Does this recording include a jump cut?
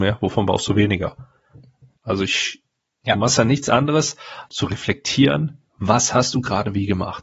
yes; 3 cuts; at 2.0 s, 4.5 s, 5.7 s

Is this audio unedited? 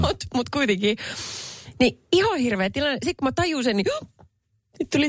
yes; 0 cuts

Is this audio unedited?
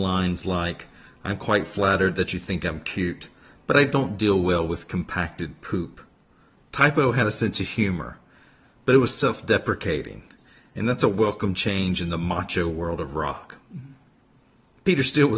no; 1 cut; at 6.6 s

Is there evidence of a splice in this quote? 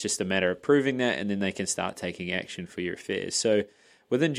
no; 0 cuts

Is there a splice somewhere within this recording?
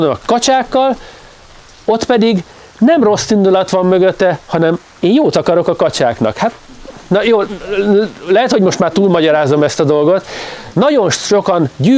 yes; 1 cut; at 10.7 s

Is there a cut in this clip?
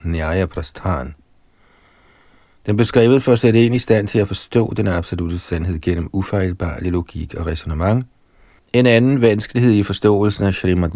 yes; 1 cut; at 8.6 s

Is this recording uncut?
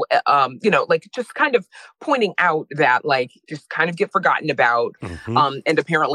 no; 2 cuts; at 3.5 s, 5.0 s

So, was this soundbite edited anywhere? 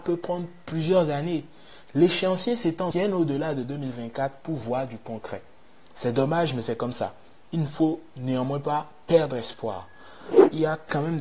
yes; 1 cut; at 2.9 s

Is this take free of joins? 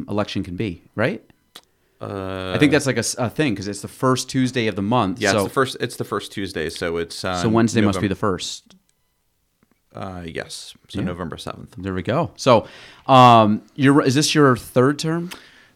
yes; 0 cuts

